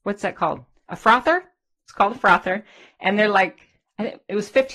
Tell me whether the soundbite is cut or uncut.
uncut